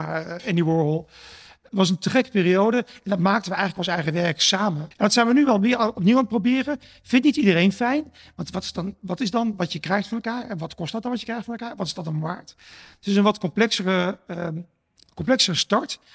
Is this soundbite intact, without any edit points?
no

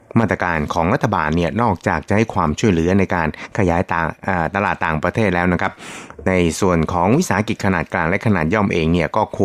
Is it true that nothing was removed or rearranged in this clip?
yes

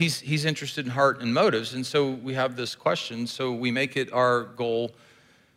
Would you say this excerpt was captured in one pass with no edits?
yes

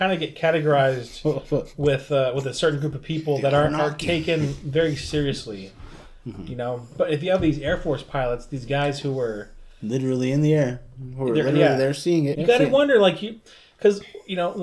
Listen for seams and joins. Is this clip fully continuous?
no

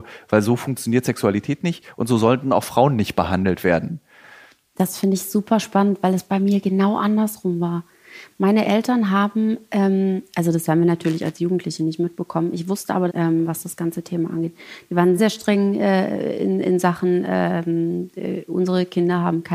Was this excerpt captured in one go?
no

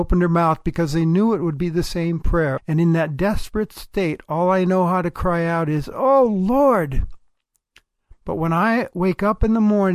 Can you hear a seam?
yes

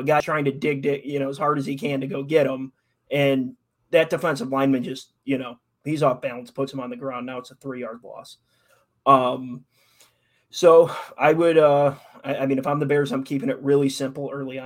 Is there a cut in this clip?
no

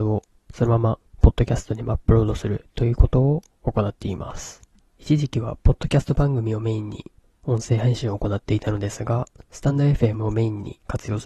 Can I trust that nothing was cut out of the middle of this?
yes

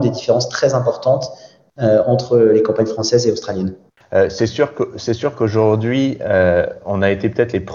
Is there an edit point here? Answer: yes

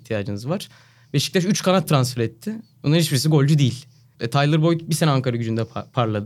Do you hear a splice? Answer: yes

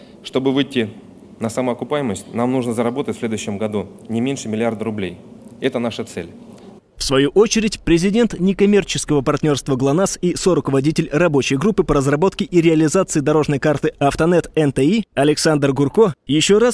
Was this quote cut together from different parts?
yes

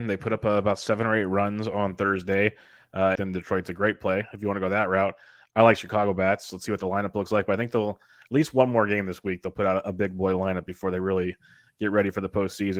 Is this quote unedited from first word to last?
no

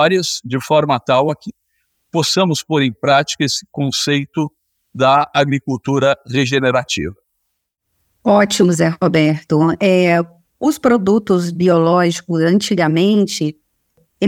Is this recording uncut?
yes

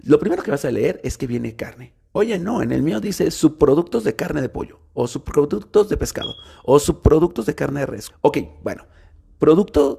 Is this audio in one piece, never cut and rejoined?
no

